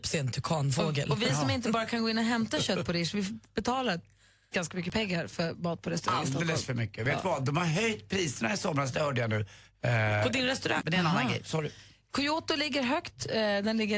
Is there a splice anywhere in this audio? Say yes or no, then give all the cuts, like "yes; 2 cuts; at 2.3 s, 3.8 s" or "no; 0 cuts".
yes; 1 cut; at 10.8 s